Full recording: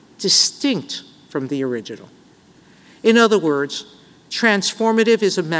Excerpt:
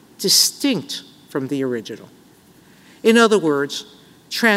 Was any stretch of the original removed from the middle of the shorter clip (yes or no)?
no